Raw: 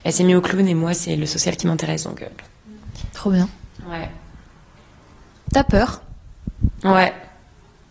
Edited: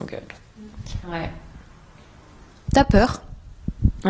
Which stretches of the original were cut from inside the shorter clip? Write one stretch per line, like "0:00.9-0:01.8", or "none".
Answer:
0:03.1-0:03.8

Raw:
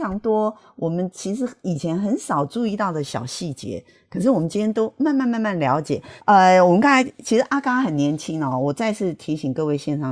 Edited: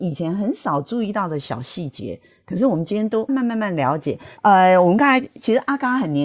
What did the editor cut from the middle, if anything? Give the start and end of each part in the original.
0:04.9-0:05.1

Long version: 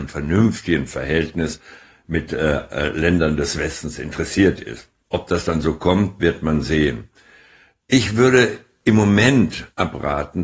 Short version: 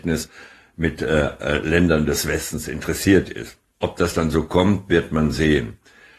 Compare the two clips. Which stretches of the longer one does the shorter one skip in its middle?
none

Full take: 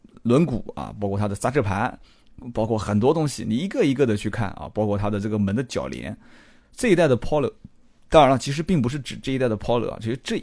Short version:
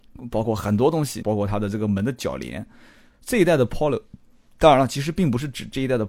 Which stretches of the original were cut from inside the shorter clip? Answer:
0:03.4-0:04.7

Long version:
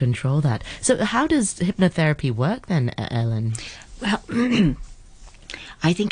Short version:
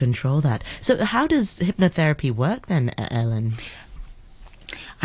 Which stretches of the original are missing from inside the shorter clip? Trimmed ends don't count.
0:04.0-0:04.8

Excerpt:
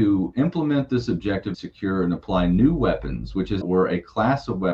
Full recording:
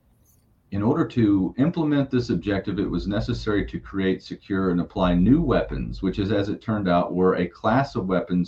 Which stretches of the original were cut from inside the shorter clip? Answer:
0:02.8-0:04.2
0:06.3-0:07.1

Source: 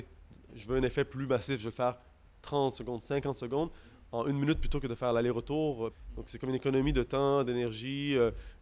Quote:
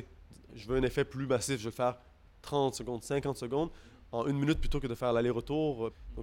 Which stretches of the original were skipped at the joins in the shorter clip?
none

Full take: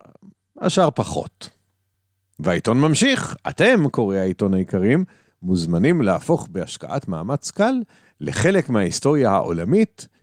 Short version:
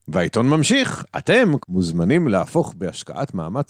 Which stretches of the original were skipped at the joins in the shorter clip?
0:03.9-0:05.3

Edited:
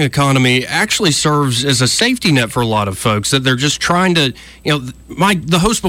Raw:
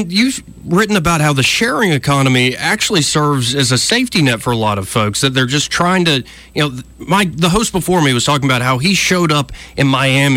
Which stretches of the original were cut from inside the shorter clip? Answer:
none

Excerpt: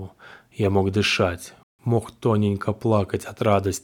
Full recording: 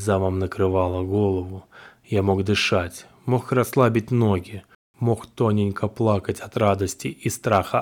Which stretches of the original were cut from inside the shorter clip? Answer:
0:03.2-0:04.8

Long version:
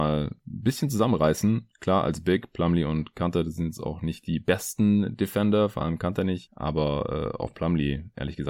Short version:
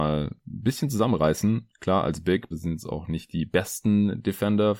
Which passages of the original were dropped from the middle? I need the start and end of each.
0:02.5-0:03.4

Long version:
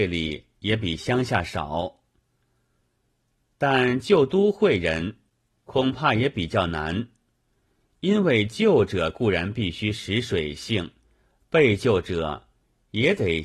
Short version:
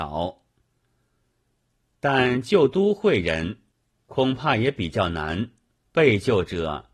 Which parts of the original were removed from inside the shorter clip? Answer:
0:07.4-0:11.4

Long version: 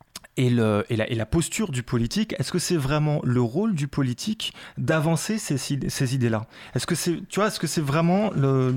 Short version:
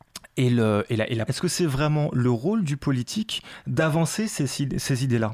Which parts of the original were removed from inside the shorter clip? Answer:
0:01.3-0:02.4

